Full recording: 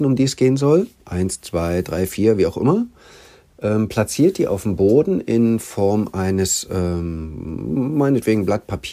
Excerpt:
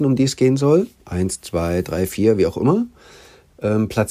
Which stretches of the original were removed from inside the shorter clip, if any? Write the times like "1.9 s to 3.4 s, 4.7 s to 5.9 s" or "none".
none